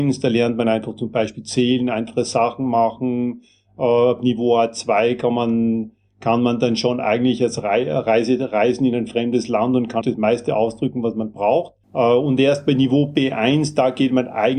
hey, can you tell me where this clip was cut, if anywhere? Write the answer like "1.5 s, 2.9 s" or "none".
10.0 s, 11.8 s

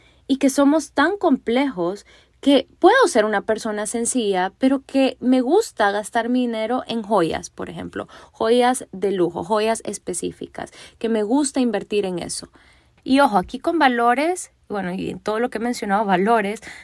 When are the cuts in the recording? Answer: 13.0 s

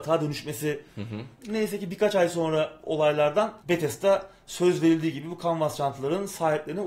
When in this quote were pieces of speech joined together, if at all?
1.4 s, 3.6 s

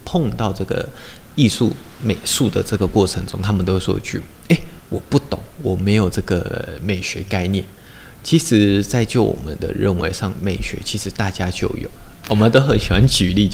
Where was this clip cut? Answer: 4.8 s

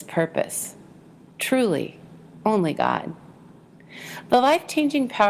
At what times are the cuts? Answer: none

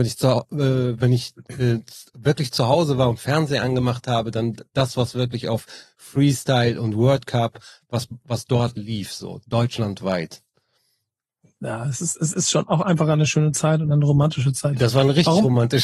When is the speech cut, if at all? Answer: none

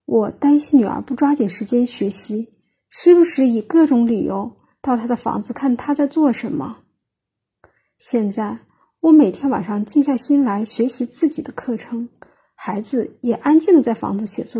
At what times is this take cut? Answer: 5.5 s

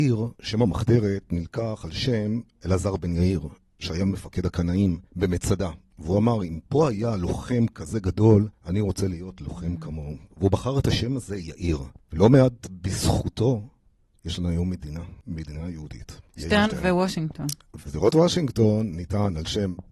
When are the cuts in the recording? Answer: 16.3 s, 17.8 s

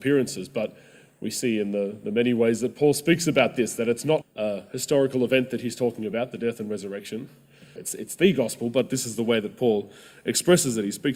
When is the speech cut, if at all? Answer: 4.2 s, 7.8 s

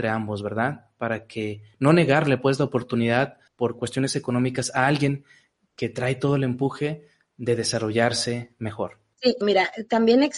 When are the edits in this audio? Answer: 3.5 s, 9.4 s

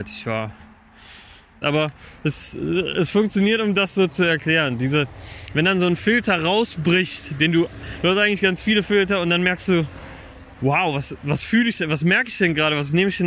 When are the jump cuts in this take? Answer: 1.6 s

